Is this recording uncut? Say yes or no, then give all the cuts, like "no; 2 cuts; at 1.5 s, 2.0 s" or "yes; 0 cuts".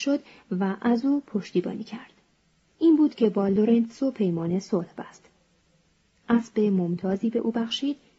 no; 1 cut; at 2.6 s